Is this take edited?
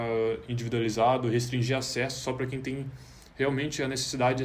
no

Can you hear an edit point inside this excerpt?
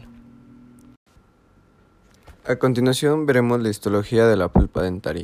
no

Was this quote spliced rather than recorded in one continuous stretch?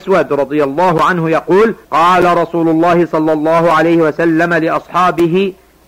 yes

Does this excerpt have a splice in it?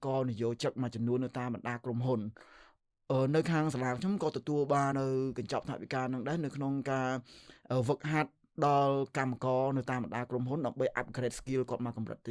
yes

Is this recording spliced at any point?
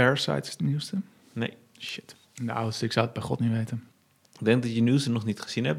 yes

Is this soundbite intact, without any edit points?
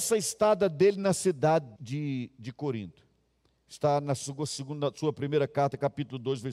no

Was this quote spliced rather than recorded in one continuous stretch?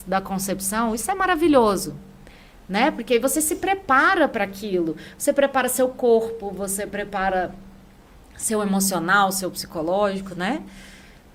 no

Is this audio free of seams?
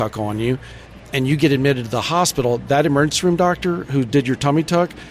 yes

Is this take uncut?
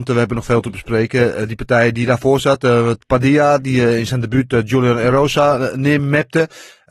yes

